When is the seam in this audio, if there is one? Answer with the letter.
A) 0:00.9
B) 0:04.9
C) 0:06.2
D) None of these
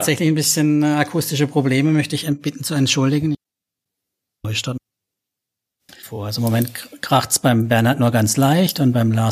D